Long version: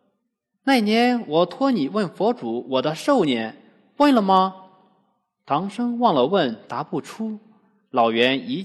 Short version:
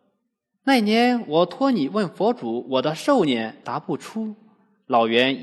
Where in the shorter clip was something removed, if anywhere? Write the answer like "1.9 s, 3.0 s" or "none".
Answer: 3.6 s

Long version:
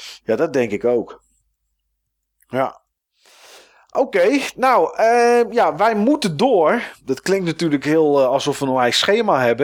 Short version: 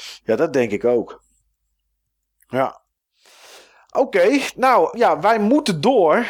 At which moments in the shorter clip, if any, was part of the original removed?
4.9 s

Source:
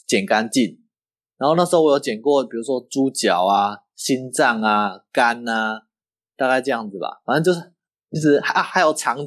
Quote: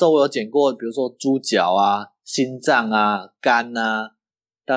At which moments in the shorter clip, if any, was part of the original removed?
none

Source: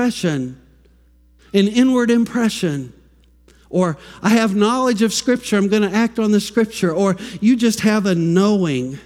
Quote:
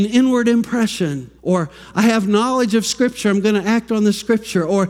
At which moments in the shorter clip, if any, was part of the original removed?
1.4 s

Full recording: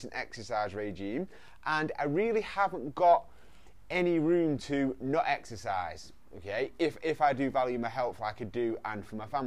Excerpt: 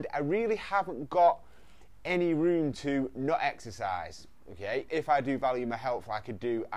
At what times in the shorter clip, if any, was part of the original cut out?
4.9 s

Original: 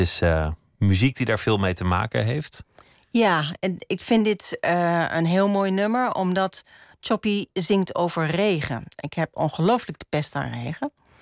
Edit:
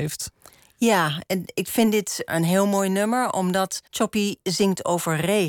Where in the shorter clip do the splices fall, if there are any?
2.3 s, 3.9 s

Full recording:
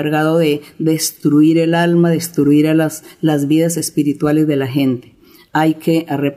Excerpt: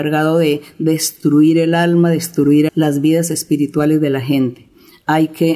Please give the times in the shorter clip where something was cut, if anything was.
2.7 s

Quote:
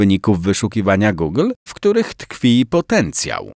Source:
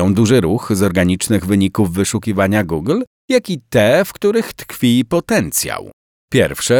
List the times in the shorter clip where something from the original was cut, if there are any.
1.7 s

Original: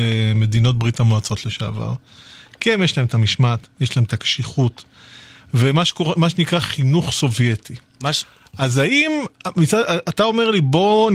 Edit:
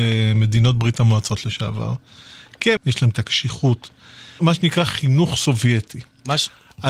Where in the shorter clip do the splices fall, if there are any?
2.8 s, 4.4 s

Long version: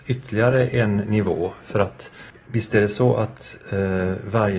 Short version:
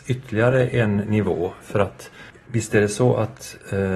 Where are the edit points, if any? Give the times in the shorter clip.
none

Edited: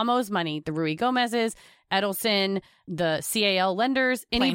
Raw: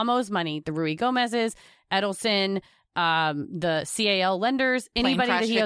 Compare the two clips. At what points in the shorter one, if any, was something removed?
2.9 s

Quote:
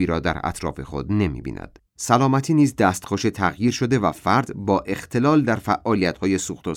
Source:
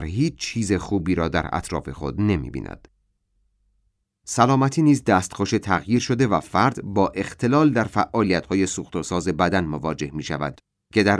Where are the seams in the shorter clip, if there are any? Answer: 1.9 s

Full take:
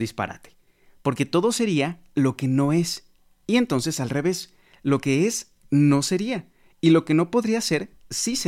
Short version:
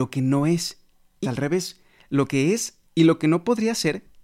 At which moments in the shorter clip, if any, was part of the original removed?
1.2 s, 2.9 s

